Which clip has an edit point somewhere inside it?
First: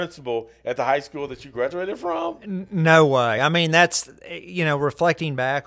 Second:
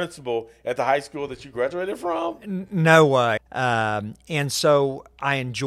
second; 1 cut; at 3.4 s

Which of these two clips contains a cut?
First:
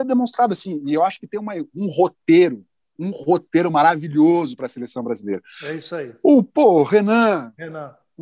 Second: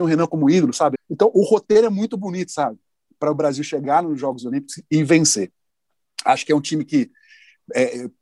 second; 1 cut; at 0.9 s

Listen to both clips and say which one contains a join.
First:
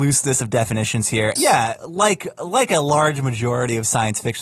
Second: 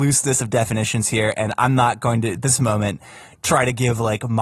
first; 1 cut; at 1.4 s

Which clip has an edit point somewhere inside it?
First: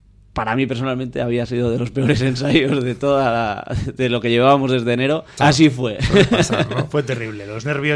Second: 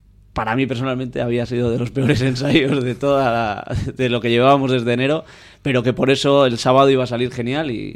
first; 1 cut; at 5.4 s

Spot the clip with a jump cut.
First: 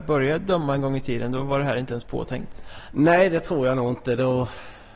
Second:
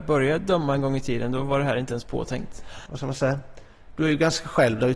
second; 1 cut; at 2.9 s

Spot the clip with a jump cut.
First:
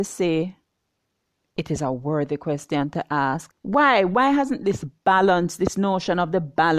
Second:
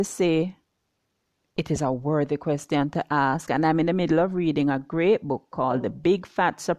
first; 1 cut; at 3.5 s

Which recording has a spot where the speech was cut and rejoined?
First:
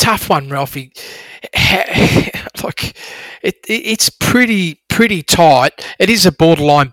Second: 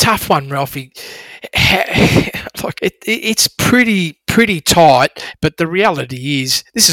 second; 2 cuts; at 2.8 s, 5.3 s

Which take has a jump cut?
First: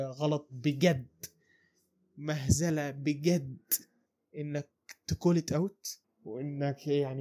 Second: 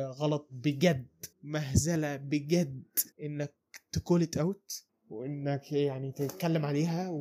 second; 2 cuts; at 1.3 s, 3.1 s

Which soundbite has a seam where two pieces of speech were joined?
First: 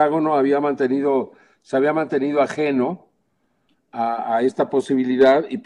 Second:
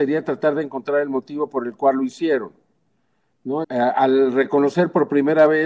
second; 1 cut; at 3.6 s

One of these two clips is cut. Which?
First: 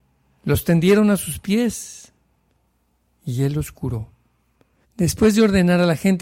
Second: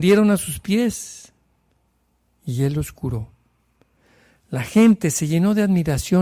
first; 1 cut; at 4.8 s

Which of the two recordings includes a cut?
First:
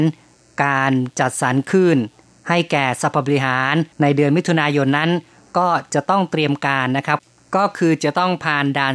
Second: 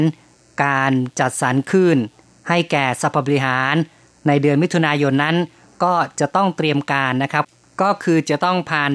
first; 1 cut; at 3.9 s

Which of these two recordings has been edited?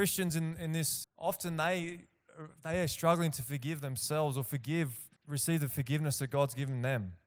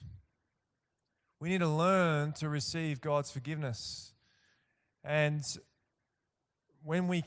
first; 2 cuts; at 1.0 s, 5.2 s

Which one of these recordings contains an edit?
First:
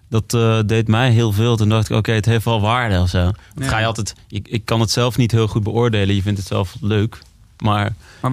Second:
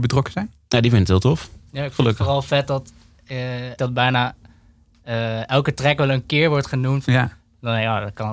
second; 2 cuts; at 3.8 s, 7.0 s

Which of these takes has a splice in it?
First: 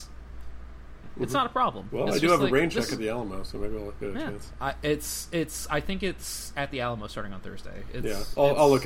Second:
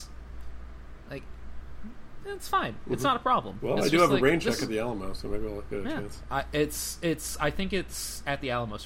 first; 1 cut; at 1.0 s

